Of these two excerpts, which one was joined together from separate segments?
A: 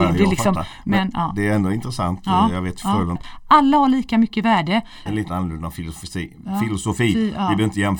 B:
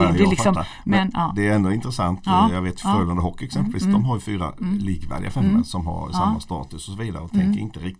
A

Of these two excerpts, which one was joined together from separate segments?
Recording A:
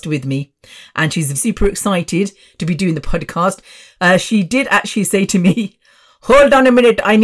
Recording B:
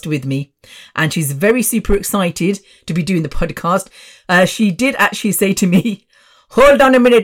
A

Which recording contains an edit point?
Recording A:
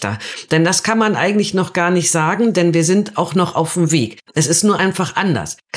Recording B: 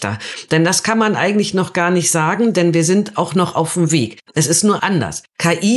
B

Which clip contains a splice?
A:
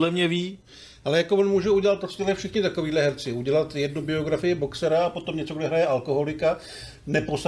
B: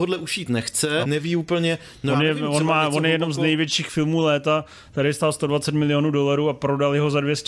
B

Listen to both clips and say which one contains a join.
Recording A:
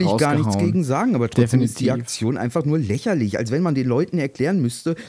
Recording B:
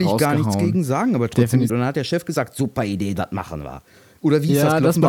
B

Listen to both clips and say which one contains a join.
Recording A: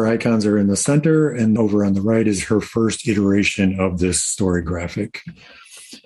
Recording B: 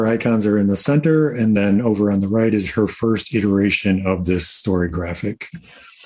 A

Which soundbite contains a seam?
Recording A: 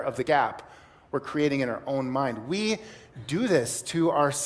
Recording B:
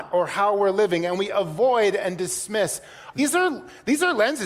B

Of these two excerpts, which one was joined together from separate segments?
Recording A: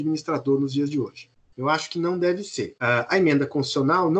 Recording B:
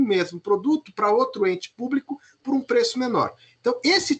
A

